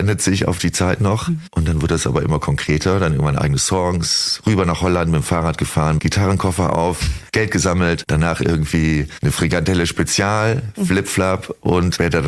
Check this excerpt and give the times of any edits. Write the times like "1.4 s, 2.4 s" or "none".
6.0 s